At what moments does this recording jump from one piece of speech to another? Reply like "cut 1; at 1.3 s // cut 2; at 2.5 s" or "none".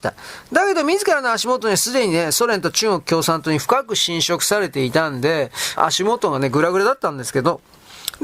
cut 1; at 5.8 s